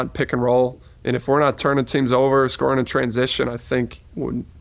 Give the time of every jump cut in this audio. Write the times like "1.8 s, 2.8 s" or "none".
none